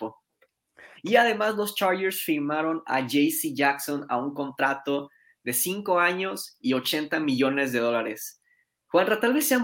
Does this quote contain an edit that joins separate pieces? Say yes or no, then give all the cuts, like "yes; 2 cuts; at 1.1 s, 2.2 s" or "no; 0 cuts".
yes; 1 cut; at 0.9 s